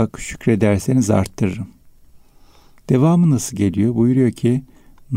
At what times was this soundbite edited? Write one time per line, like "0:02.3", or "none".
none